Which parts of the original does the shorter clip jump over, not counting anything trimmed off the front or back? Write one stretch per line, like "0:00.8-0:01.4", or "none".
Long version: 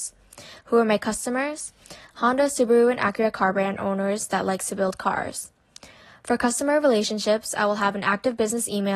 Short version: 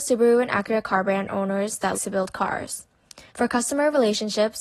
0:04.4-0:04.6
0:05.9-0:06.2